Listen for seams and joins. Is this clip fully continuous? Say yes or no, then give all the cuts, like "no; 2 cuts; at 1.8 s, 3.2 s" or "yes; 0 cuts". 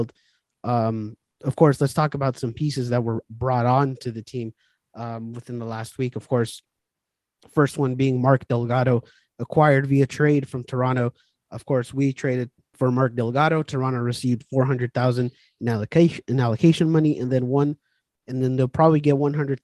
yes; 0 cuts